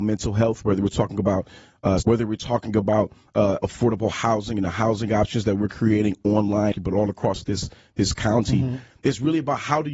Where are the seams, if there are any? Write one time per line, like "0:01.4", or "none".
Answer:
0:02.0
0:06.7